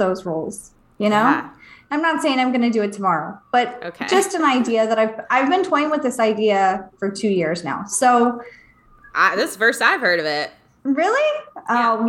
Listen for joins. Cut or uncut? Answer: uncut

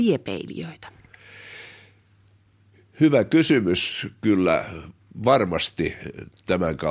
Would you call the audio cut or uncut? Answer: uncut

